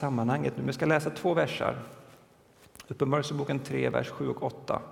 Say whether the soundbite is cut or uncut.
uncut